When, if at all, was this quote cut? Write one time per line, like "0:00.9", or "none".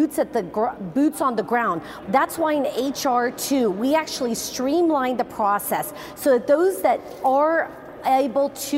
0:02.0